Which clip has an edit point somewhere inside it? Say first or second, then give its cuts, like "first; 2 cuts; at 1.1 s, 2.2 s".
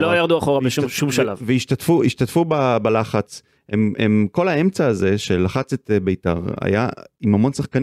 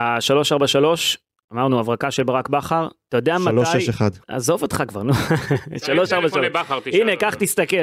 second; 1 cut; at 4.2 s